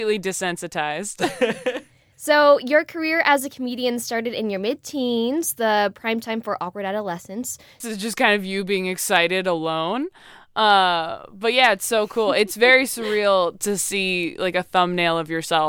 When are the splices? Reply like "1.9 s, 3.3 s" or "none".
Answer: 7.8 s